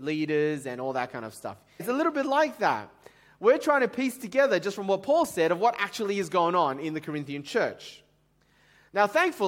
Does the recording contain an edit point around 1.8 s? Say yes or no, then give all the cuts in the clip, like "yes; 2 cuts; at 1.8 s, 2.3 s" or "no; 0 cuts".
yes; 1 cut; at 1.8 s